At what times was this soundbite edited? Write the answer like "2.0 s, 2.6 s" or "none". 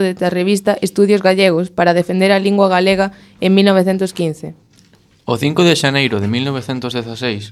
none